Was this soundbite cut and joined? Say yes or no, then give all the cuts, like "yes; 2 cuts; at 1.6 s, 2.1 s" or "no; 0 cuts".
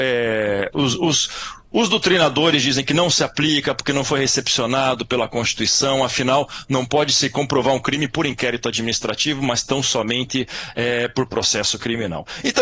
yes; 1 cut; at 1.6 s